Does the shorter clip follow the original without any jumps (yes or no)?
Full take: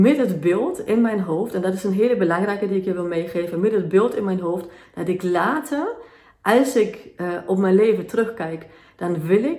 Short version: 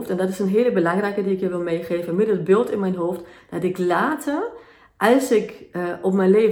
yes